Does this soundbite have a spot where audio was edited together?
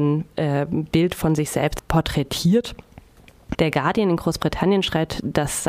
yes; 1 cut; at 3.5 s

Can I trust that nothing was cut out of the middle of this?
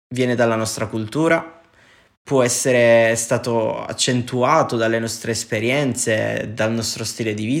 yes; 0 cuts

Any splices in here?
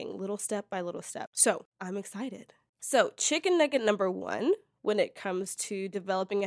yes; 1 cut; at 2.7 s

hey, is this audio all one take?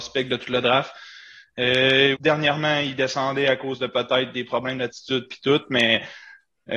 no; 1 cut; at 2.1 s

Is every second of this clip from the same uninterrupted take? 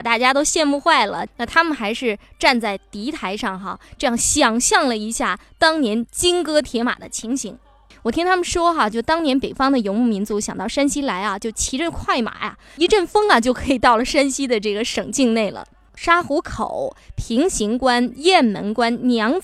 no; 3 cuts; at 1.3 s, 7.9 s, 15.9 s

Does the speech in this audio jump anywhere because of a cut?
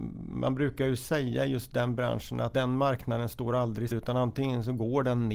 yes; 2 cuts; at 2.5 s, 3.9 s

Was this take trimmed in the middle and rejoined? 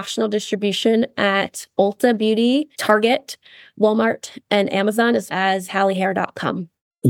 yes; 2 cuts; at 2.7 s, 5.3 s

